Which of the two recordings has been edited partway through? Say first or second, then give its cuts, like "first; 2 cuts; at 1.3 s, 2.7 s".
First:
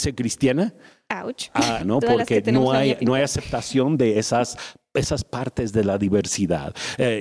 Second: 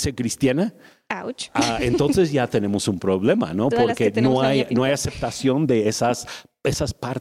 first; 1 cut; at 1.8 s